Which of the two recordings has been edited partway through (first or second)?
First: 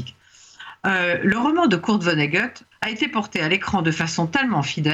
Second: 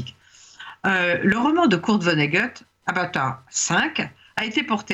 first